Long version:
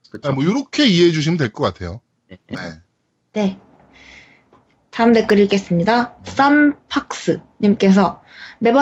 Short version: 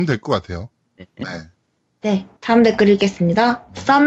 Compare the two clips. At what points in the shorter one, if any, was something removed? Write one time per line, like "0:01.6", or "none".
0:02.4